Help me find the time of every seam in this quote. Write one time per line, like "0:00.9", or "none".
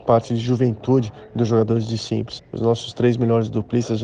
0:02.4